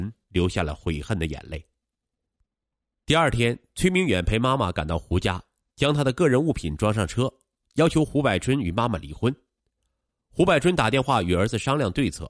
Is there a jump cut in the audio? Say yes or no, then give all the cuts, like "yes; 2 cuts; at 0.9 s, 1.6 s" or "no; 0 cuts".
no; 0 cuts